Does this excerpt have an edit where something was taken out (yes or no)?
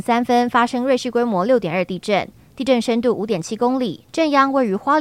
no